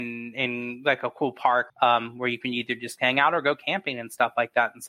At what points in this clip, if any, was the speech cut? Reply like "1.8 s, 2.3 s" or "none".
1.7 s